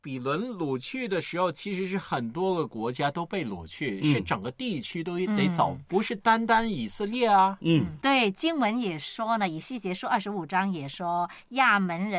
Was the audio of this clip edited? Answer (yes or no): no